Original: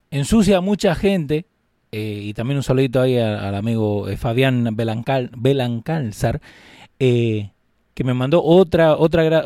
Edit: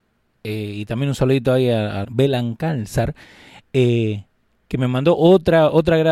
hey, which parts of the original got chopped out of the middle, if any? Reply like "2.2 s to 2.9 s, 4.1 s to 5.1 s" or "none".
3.5 s to 5.3 s